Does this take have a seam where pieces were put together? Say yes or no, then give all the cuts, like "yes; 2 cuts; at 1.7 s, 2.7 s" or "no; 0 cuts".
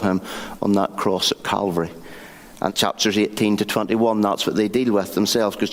yes; 1 cut; at 2.7 s